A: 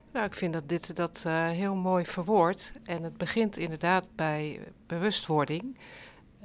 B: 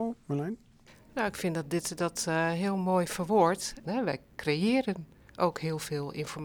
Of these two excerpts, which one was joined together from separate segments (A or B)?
B